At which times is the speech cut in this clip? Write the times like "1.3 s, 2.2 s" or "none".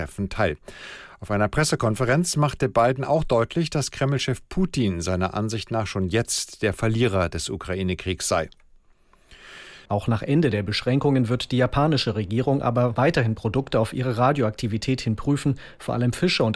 9.9 s